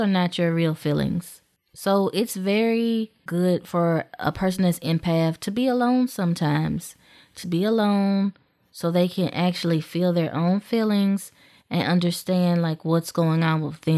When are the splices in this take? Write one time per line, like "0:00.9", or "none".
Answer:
0:03.3
0:07.4